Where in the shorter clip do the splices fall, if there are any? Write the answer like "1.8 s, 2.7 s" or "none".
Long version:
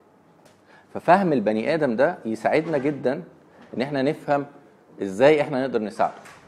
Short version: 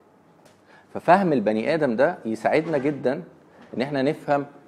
none